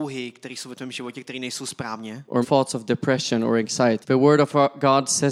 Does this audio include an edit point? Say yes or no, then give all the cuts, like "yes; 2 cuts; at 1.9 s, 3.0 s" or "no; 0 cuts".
yes; 2 cuts; at 2.4 s, 4.0 s